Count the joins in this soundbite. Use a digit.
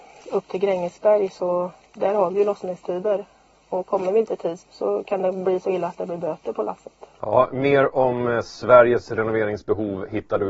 2